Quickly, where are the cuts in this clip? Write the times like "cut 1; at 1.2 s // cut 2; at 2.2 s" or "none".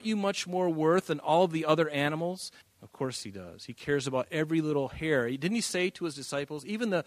cut 1; at 2.6 s